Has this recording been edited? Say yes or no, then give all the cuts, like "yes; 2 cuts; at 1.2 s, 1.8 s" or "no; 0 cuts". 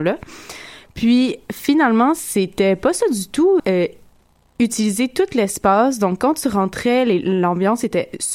yes; 1 cut; at 3.6 s